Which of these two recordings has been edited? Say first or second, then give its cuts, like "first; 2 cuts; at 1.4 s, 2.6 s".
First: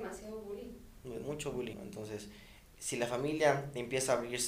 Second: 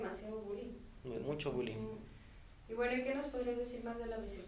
first; 1 cut; at 1.7 s